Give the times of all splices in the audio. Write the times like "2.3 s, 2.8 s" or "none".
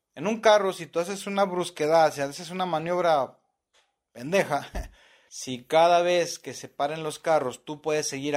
5.3 s